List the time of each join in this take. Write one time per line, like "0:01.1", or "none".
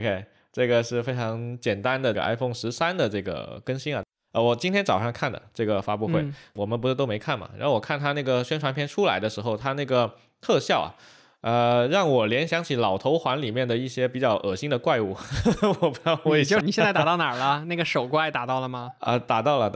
0:16.6